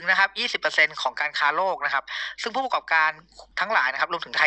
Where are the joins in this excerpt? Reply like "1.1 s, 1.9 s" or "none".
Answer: 3.5 s